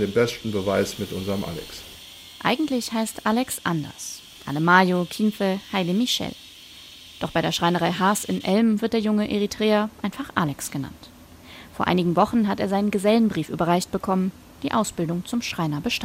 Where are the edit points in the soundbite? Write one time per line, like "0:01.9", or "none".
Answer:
none